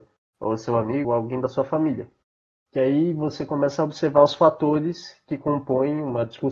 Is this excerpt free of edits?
no; 1 cut; at 1.0 s

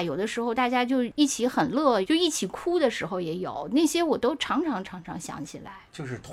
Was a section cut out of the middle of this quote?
yes; 1 cut; at 2.0 s

